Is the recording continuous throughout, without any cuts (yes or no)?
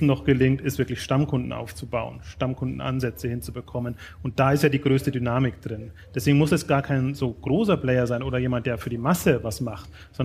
yes